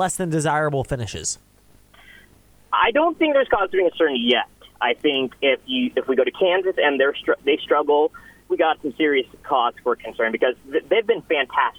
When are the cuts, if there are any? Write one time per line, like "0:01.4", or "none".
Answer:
0:08.5